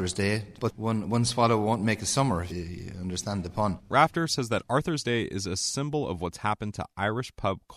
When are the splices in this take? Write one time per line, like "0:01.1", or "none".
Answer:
0:02.5